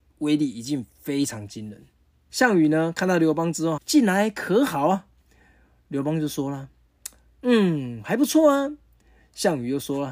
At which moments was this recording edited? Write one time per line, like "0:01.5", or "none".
0:02.3
0:03.8